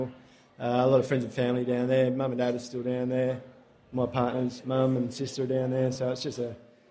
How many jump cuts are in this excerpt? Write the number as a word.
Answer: zero